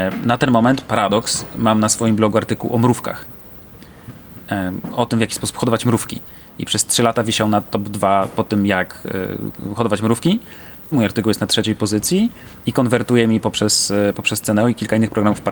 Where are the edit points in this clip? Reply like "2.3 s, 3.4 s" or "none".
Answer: 10.9 s